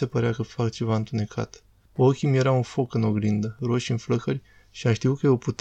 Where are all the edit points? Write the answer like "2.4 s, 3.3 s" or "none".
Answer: 1.9 s

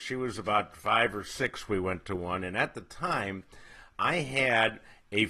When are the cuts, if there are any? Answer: none

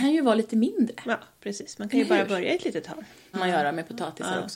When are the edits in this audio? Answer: 3.3 s

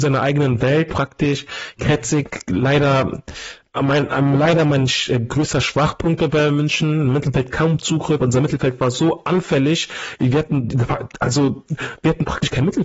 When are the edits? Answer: none

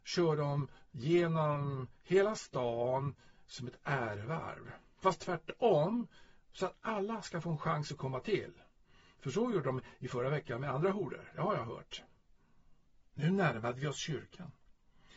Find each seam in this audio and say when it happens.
none

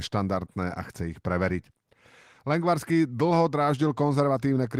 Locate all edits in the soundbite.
none

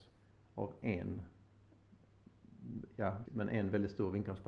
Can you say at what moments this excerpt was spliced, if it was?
3.3 s

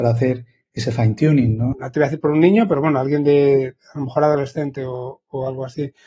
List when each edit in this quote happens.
1.7 s

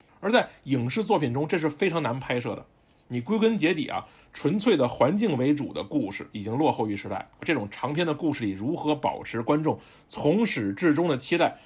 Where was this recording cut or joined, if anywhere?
7.4 s

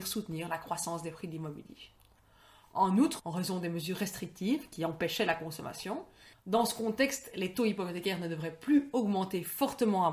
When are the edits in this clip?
3.2 s, 6.3 s

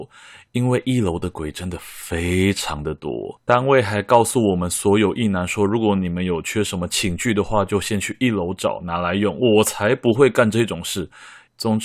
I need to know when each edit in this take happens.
none

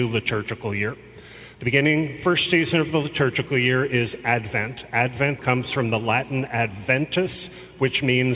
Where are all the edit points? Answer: 5.4 s

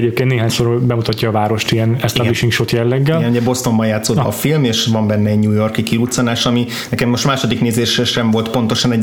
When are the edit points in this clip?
4.2 s

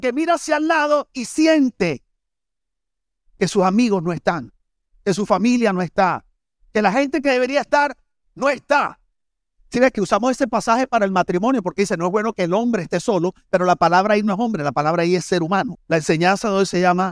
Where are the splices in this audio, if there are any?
9.5 s, 15.7 s

